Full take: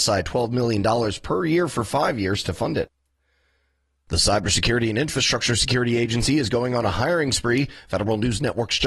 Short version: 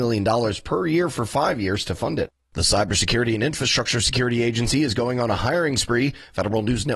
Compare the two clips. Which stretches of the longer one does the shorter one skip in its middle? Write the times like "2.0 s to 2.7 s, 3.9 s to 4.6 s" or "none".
3.0 s to 4.0 s